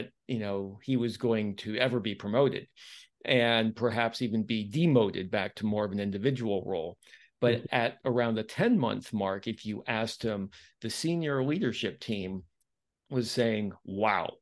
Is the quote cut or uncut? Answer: uncut